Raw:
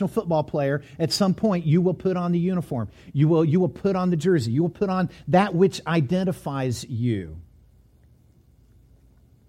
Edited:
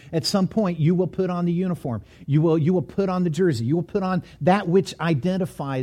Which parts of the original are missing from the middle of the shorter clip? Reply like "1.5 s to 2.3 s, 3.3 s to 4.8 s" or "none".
none